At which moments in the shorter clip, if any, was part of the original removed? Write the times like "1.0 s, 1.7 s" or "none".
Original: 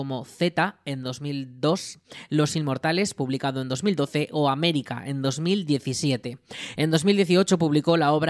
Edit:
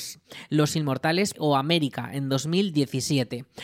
1.3 s